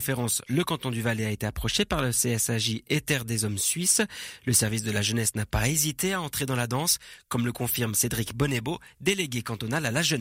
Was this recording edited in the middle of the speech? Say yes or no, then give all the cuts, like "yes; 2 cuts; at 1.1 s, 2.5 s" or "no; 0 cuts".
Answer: no; 0 cuts